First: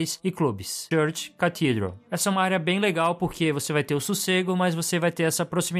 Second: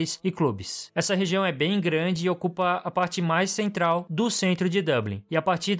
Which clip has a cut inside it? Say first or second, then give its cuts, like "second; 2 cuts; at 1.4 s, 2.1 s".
first; 1 cut; at 0.9 s